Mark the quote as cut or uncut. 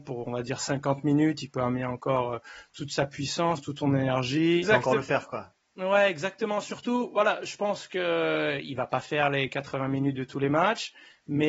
cut